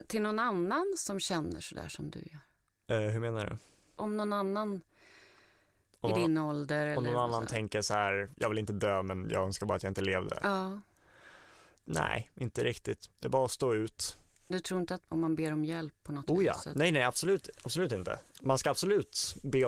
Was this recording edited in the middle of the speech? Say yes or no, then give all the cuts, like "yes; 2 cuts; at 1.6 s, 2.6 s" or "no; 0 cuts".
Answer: no; 0 cuts